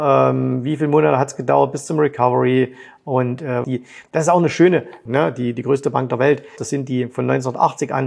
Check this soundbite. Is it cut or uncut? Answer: cut